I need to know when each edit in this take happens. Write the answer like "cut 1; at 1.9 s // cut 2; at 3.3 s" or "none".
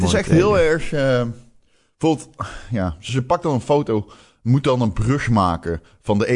cut 1; at 3.1 s

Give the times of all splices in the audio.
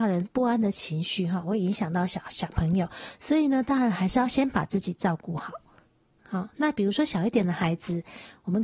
cut 1; at 6.2 s

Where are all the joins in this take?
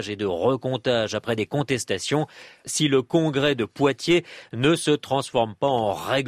cut 1; at 2.6 s

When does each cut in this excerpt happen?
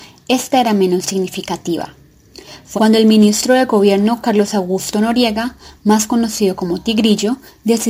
cut 1; at 2.7 s

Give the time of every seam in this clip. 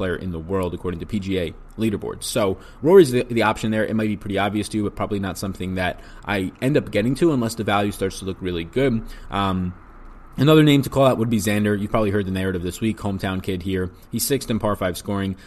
none

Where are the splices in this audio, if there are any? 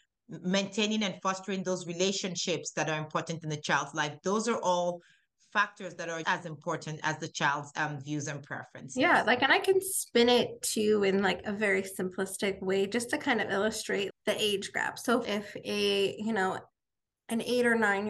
cut 1; at 6.2 s // cut 2; at 14.1 s // cut 3; at 15.2 s

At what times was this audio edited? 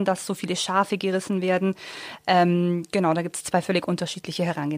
none

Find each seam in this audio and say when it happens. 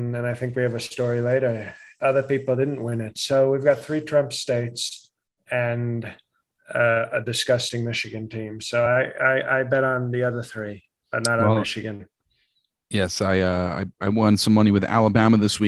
none

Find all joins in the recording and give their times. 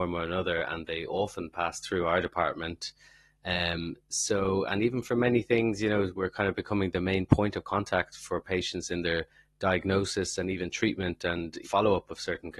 cut 1; at 11.6 s

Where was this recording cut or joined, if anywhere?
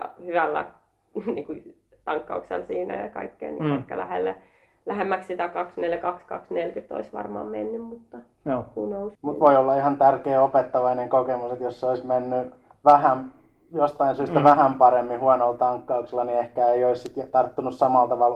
cut 1; at 9.2 s

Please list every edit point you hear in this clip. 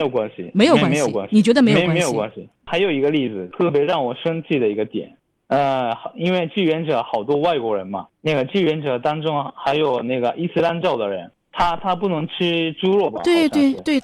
none

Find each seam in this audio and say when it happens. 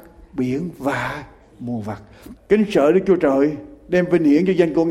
cut 1; at 2.4 s

